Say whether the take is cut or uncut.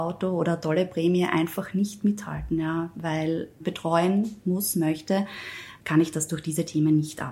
cut